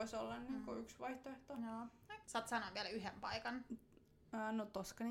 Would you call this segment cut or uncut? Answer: cut